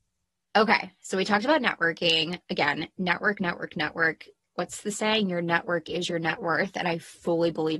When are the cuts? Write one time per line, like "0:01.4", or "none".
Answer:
none